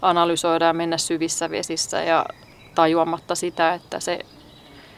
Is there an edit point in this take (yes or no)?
no